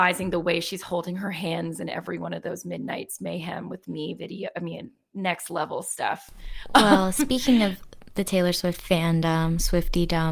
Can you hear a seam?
no; 0 cuts

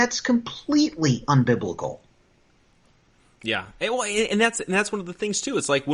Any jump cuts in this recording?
no; 0 cuts

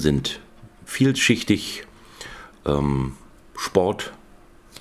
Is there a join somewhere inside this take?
no; 0 cuts

